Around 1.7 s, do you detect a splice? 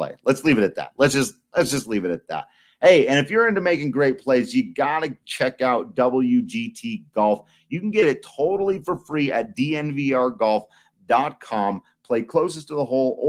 no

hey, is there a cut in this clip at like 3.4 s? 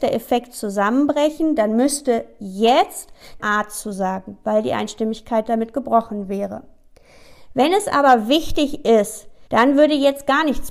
yes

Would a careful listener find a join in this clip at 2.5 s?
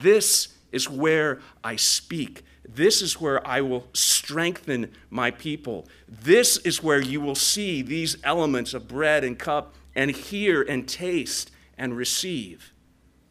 no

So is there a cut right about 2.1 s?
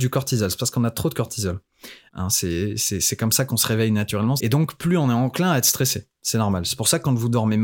yes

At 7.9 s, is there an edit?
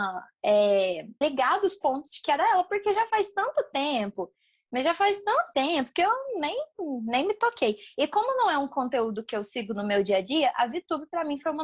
no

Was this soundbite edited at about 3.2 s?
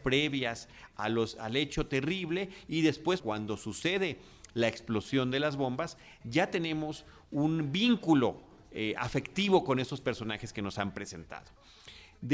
yes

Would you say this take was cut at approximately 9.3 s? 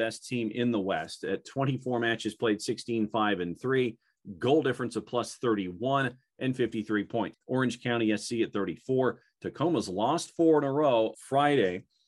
no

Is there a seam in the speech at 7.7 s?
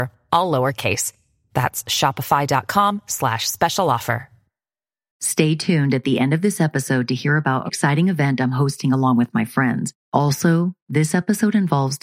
yes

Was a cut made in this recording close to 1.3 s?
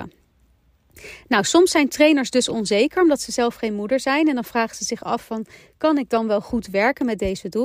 no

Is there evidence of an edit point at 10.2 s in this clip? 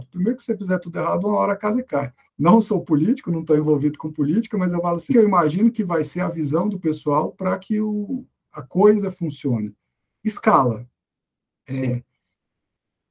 no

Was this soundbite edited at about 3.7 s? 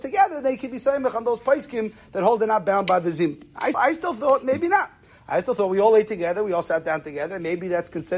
yes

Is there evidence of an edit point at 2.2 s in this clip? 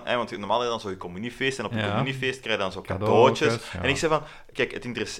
no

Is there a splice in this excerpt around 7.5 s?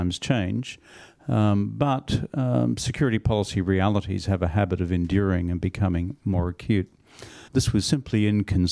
yes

